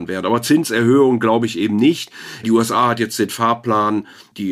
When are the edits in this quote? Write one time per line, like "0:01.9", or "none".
0:02.4